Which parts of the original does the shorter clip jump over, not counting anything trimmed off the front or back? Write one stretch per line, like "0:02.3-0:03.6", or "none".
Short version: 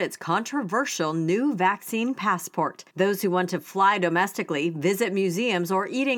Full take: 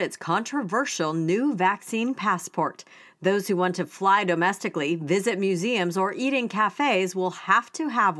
0:02.9-0:03.2

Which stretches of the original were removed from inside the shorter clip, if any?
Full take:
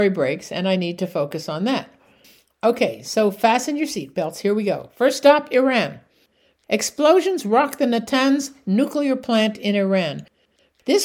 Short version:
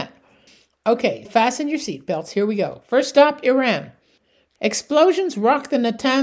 0:03.0-0:03.3

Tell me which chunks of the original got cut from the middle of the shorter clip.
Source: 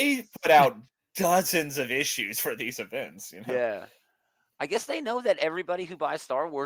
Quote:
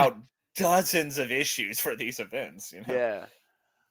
none

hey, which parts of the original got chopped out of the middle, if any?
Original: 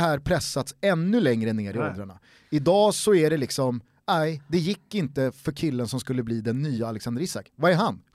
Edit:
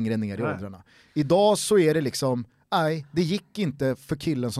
none

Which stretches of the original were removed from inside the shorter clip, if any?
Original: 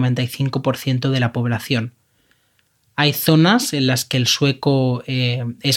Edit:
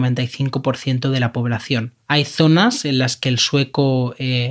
0:02.0-0:02.9

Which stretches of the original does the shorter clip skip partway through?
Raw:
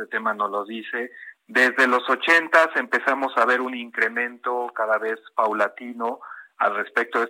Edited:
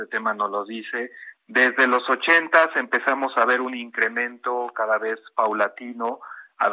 none

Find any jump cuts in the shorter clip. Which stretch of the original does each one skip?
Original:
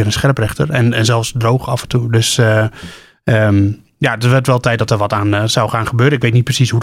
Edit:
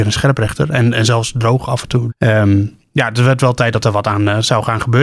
0:02.1-0:03.1

